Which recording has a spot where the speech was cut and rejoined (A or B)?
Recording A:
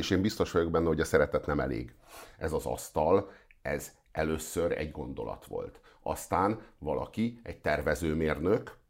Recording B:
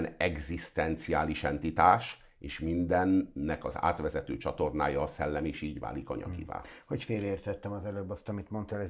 A